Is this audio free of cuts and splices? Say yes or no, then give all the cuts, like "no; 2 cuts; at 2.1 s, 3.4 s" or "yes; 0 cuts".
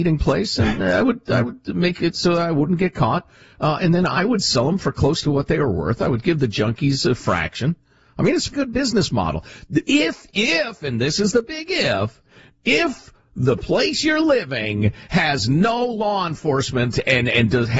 no; 1 cut; at 8.5 s